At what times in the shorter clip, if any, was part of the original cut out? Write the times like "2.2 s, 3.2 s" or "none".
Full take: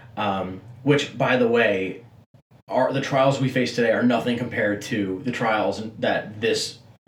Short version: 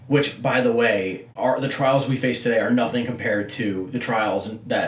1.3 s